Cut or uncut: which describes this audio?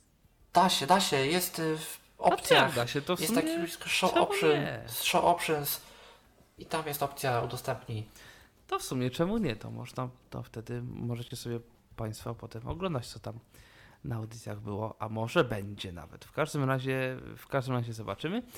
uncut